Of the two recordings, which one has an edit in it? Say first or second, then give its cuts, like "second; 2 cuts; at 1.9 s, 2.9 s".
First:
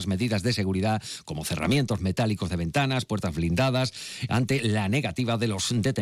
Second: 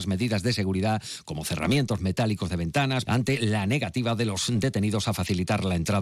second; 1 cut; at 3.1 s